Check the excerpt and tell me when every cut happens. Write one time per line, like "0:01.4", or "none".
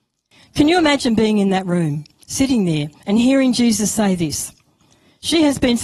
none